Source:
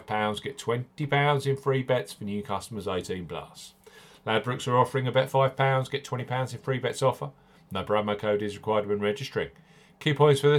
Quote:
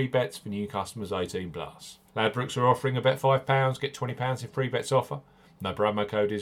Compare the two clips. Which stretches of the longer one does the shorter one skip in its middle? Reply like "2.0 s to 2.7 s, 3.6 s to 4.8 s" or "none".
3.8 s to 4.2 s